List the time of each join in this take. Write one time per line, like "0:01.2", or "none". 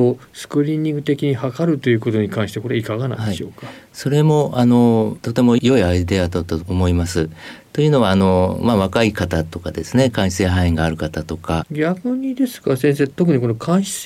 0:11.6

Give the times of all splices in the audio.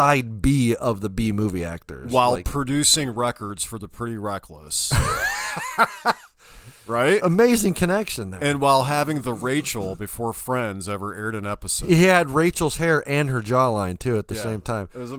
none

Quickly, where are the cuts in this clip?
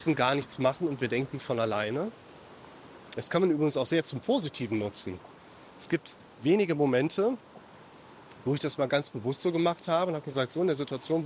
none

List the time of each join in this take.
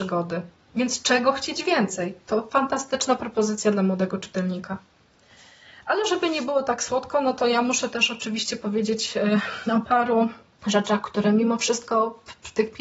none

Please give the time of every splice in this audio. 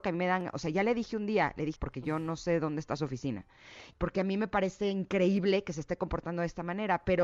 0:01.8
0:03.9

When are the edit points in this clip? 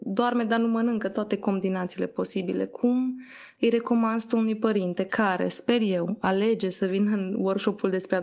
none

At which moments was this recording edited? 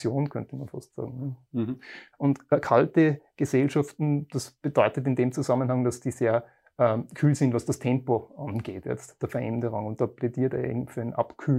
0:02.1

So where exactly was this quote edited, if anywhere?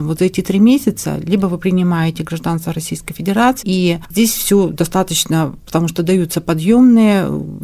0:03.6
0:05.6

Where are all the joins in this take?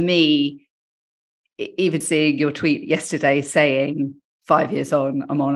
0:02.0

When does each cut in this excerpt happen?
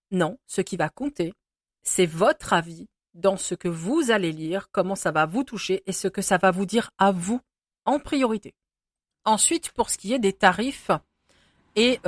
none

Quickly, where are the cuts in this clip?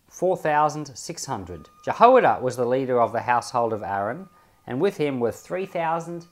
0:01.8

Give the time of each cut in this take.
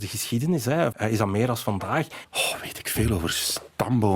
0:00.9
0:02.2

